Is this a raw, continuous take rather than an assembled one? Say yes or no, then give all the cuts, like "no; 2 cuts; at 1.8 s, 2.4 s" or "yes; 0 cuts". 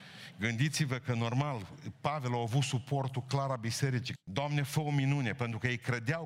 no; 1 cut; at 4.2 s